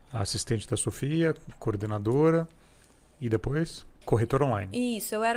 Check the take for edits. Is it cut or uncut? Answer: cut